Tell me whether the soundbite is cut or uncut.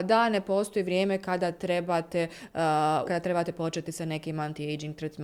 cut